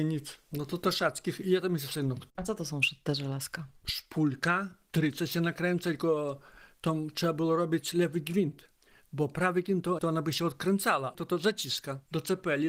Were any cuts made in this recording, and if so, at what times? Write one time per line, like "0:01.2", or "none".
0:10.0
0:11.2